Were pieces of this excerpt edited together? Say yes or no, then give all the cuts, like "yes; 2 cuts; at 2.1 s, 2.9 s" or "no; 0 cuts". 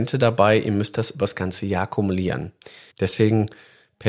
yes; 1 cut; at 2.9 s